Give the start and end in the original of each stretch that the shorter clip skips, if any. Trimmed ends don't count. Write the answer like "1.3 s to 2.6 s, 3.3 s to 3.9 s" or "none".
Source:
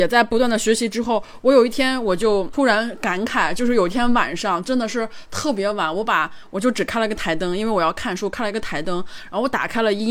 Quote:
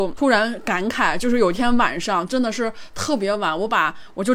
none